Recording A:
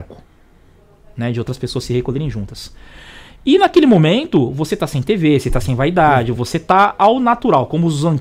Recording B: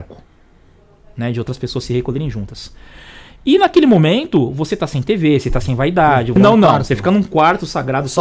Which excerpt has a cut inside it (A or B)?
B